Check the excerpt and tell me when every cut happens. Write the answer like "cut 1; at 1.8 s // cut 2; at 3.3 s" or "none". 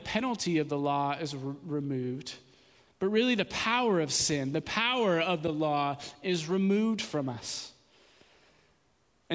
none

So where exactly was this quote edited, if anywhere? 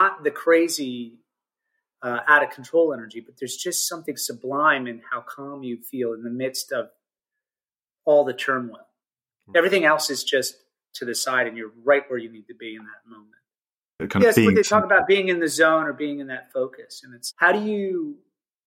cut 1; at 9.3 s // cut 2; at 14.0 s // cut 3; at 17.3 s

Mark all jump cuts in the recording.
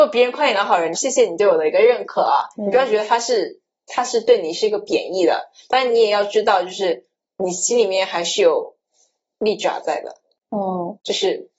cut 1; at 0.9 s

